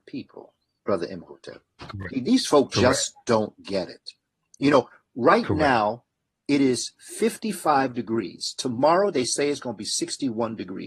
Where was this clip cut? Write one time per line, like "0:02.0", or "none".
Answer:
0:02.1